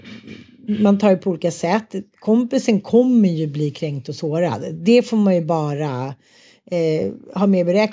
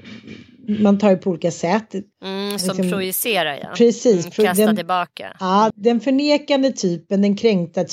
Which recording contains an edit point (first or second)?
second